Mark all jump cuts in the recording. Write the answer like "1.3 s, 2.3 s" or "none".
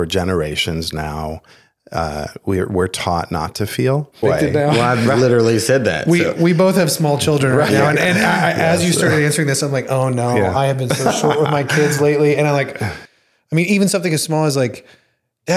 4.2 s